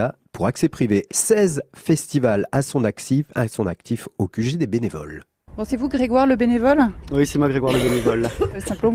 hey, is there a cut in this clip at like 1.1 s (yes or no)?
yes